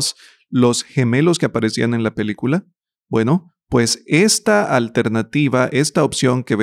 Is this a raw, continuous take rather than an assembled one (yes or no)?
yes